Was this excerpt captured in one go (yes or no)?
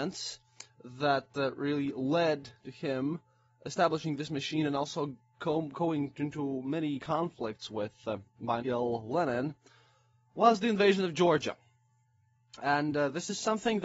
no